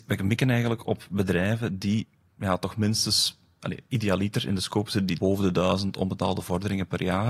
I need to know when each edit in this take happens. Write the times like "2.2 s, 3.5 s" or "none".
5.2 s